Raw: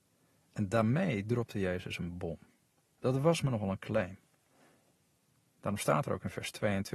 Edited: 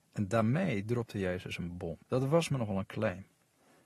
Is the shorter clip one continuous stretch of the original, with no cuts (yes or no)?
no